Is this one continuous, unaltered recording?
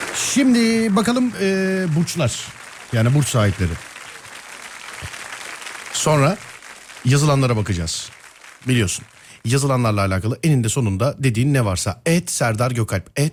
yes; 0 cuts

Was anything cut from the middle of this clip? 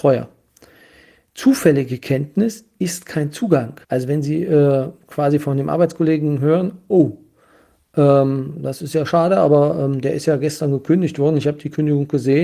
yes; 1 cut; at 3.8 s

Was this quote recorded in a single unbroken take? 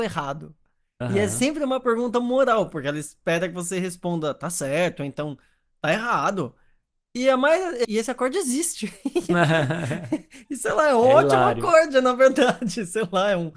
no; 1 cut; at 7.8 s

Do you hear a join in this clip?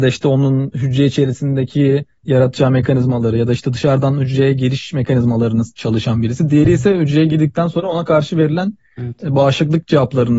no; 0 cuts

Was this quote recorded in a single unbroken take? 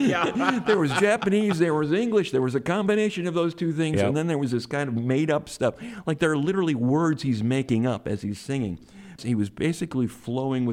no; 1 cut; at 9.2 s

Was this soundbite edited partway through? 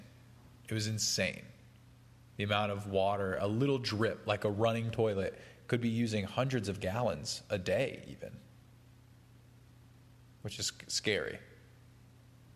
no; 0 cuts

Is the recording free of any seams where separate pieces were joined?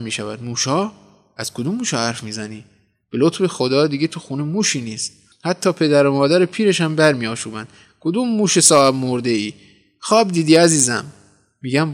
yes; 0 cuts

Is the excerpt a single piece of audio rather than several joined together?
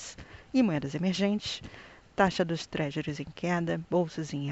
yes; 0 cuts

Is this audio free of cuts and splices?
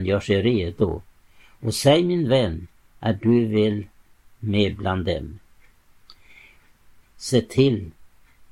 no; 1 cut; at 7.0 s

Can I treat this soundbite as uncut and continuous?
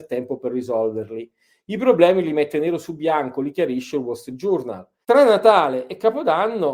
no; 1 cut; at 5.0 s

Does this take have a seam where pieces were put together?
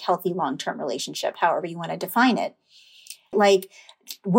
yes; 1 cut; at 3.3 s

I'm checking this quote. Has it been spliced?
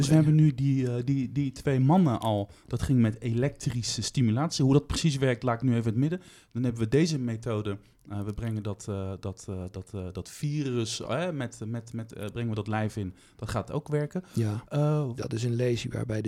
yes; 1 cut; at 15.2 s

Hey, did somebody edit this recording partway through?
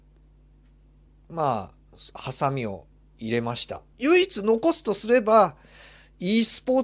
yes; 1 cut; at 3.9 s

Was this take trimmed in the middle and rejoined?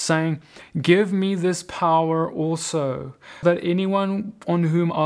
yes; 1 cut; at 3.4 s

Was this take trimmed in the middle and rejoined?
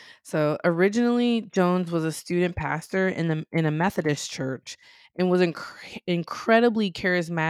no; 0 cuts

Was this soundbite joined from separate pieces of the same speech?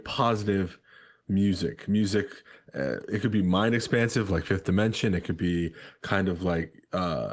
no; 0 cuts

